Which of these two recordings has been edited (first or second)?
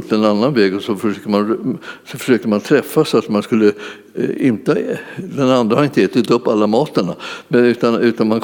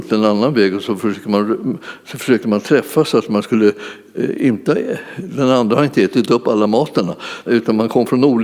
second